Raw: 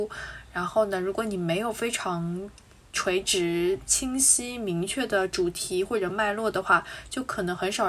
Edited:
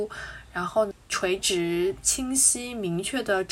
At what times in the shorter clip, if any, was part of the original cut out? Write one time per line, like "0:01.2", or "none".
0:00.9